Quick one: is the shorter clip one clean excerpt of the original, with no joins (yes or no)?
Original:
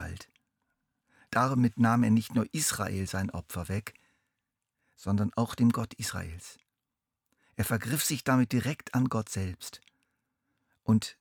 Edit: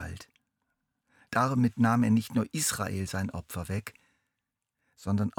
yes